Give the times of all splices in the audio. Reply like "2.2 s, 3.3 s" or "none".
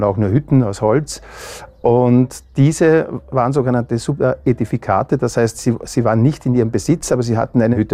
none